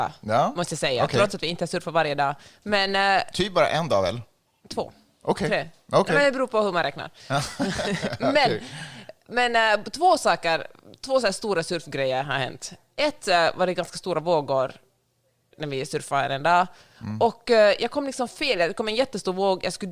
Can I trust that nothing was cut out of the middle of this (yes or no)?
yes